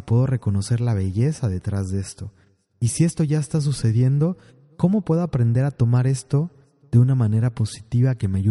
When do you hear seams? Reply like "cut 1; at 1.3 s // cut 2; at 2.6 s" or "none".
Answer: none